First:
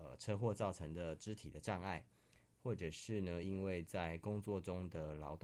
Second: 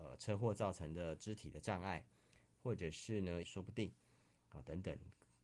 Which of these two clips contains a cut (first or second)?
second